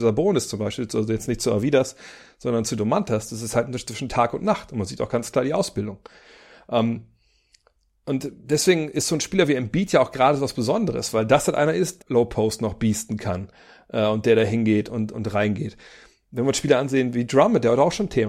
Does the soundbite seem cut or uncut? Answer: cut